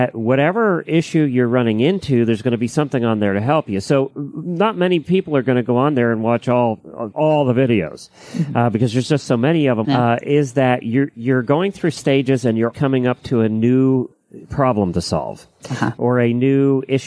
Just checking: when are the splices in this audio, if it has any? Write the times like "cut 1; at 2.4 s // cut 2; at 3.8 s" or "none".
cut 1; at 7.1 s // cut 2; at 9.8 s // cut 3; at 12.7 s